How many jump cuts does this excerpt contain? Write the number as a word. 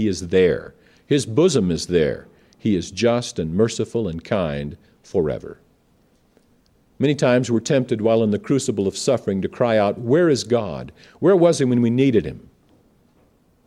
zero